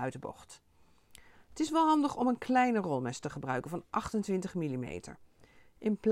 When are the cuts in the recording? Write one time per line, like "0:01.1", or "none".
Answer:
none